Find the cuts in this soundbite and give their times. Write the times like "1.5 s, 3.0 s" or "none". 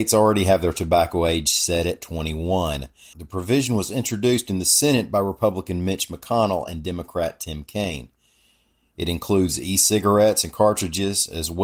3.1 s